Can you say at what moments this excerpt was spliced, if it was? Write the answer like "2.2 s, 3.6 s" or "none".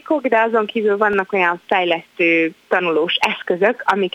none